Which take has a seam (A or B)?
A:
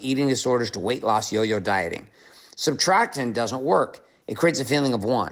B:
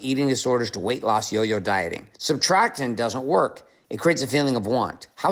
B